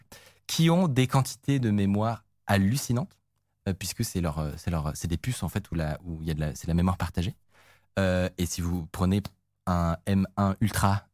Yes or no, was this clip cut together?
no